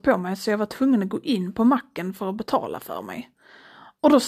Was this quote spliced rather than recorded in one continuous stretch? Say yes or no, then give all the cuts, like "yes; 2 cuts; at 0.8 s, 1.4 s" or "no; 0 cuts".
no; 0 cuts